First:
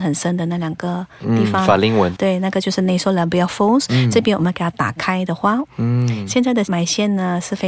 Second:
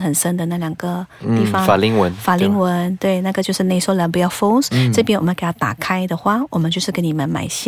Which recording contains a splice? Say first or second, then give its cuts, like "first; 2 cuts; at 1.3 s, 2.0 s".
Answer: first; 2 cuts; at 2.2 s, 5.7 s